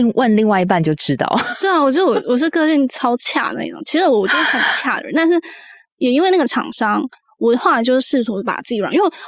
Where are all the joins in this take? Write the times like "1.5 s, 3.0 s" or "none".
none